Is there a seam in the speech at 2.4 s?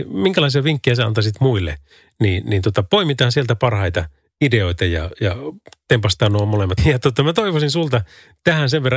no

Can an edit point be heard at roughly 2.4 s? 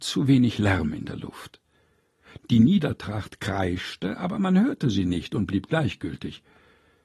yes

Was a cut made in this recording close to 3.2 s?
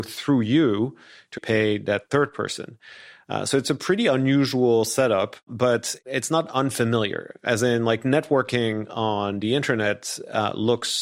no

